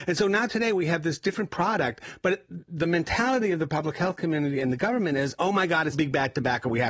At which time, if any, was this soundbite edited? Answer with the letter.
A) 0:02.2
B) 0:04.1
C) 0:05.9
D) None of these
C